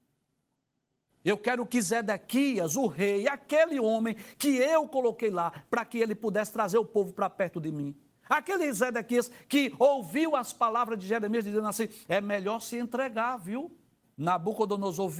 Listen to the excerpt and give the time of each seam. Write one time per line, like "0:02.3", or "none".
0:14.0